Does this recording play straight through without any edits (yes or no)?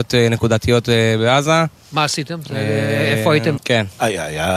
no